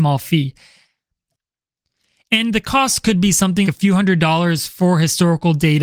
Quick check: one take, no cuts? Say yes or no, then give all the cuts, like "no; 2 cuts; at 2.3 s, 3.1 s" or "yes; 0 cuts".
no; 1 cut; at 3.6 s